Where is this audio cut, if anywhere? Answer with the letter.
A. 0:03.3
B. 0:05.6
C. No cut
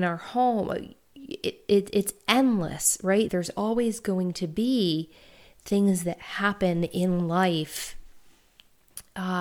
A